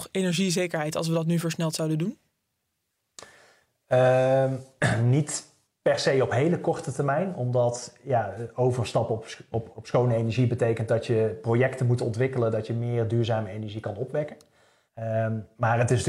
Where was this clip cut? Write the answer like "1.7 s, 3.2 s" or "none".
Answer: 9.7 s, 14.9 s